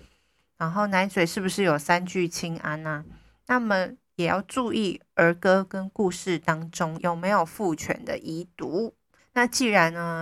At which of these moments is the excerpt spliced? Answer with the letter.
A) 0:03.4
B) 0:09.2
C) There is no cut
B